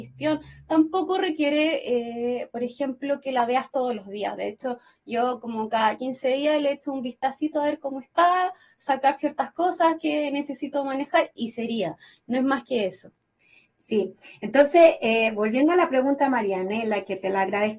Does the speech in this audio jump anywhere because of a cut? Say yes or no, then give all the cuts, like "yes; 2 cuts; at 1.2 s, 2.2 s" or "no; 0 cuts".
no; 0 cuts